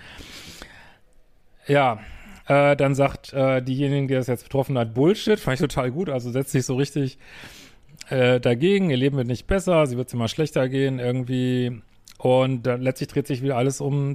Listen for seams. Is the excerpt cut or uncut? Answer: uncut